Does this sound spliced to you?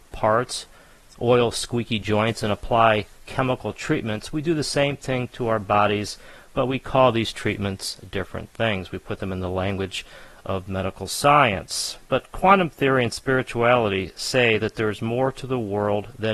no; 0 cuts

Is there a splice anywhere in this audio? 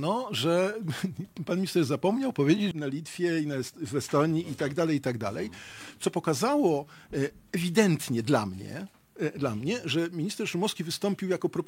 yes; 1 cut; at 2.7 s

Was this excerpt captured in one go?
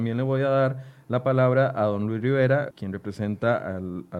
no; 1 cut; at 2.7 s

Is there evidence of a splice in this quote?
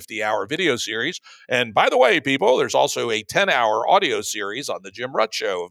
no; 0 cuts

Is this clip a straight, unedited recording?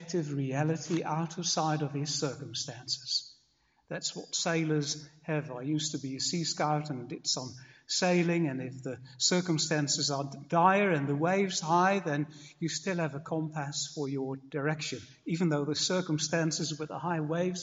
yes; 0 cuts

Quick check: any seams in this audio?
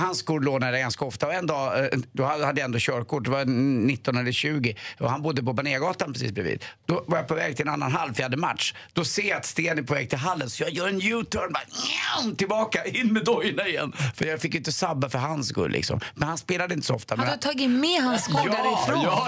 no; 0 cuts

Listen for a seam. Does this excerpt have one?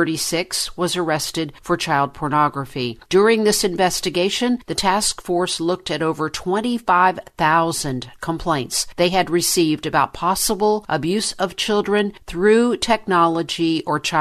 yes; 1 cut; at 3.1 s

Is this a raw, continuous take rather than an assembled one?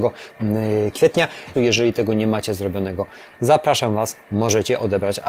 no; 1 cut; at 1.5 s

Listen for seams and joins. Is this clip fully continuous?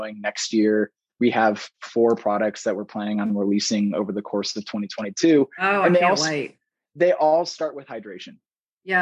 yes; 0 cuts

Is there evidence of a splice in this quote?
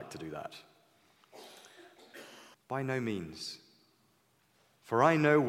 yes; 1 cut; at 2.5 s

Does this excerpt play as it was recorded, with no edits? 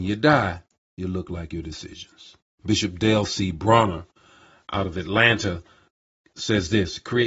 no; 1 cut; at 2.5 s

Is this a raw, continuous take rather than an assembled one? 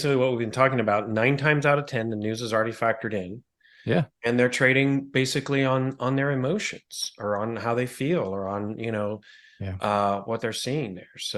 yes; 0 cuts

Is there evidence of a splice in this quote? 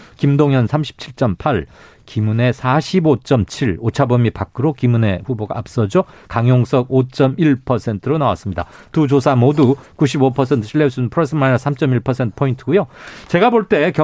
no; 0 cuts

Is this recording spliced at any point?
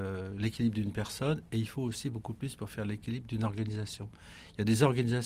no; 0 cuts

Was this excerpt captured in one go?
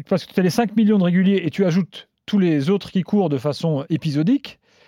yes; 0 cuts

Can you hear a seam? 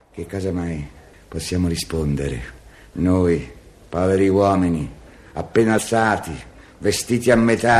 no; 0 cuts

